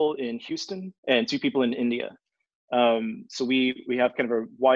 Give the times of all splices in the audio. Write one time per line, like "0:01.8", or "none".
0:01.0